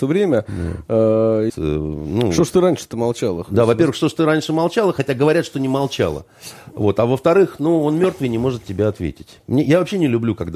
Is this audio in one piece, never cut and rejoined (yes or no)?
no